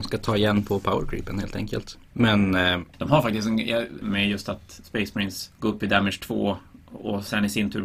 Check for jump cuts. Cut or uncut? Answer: cut